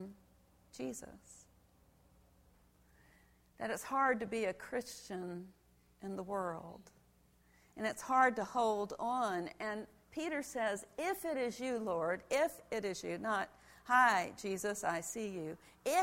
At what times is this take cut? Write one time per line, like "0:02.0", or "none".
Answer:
none